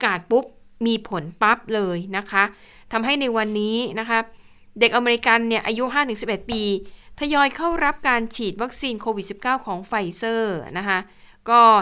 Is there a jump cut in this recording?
no; 0 cuts

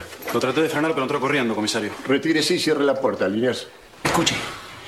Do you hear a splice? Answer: no; 0 cuts

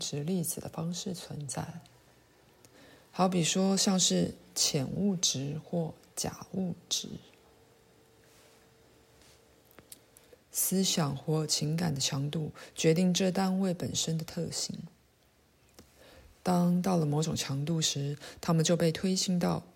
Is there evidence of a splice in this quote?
yes; 1 cut; at 10.3 s

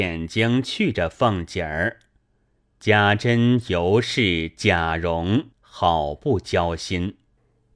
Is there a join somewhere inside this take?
yes; 2 cuts; at 2.7 s, 5.5 s

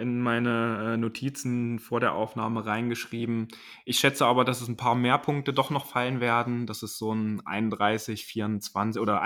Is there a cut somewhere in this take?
no; 0 cuts

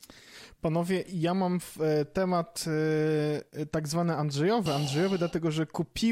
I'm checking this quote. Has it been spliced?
yes; 1 cut; at 4.7 s

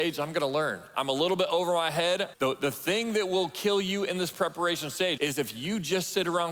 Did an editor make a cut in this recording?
yes; 2 cuts; at 2.3 s, 5.2 s

